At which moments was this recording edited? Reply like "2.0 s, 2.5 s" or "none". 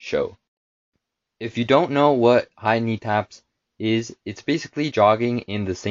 4.9 s